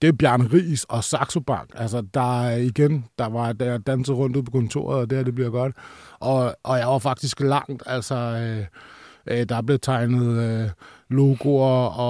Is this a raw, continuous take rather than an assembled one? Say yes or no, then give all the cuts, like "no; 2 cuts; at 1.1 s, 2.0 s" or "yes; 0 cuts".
yes; 0 cuts